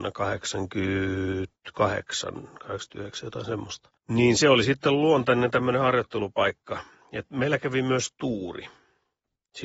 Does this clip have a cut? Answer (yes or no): yes